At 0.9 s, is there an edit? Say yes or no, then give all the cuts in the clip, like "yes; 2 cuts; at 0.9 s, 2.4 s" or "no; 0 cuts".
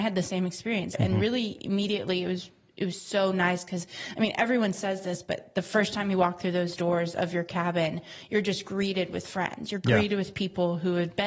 yes; 1 cut; at 0.9 s